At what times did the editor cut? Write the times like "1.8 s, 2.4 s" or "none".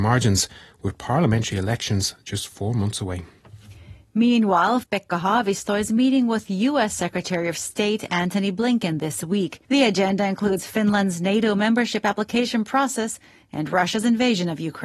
4.8 s, 9.6 s

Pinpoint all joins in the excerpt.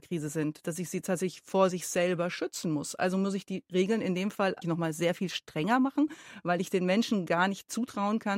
4.6 s

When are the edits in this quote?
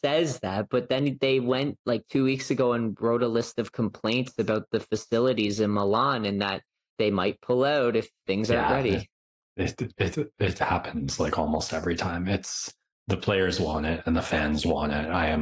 none

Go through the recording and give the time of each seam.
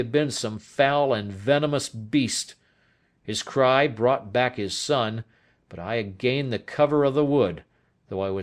none

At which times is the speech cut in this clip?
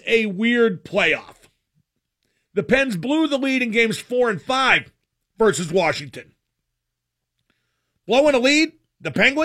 none

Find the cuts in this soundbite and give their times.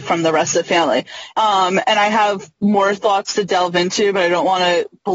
1.3 s

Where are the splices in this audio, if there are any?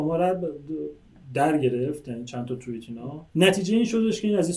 3.3 s

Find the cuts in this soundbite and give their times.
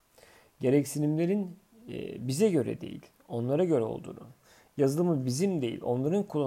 none

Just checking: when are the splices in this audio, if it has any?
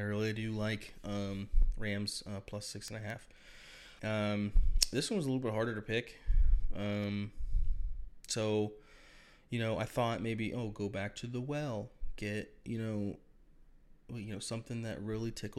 4.0 s

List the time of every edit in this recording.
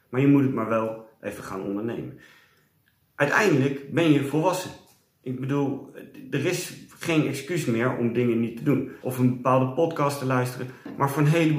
9.0 s

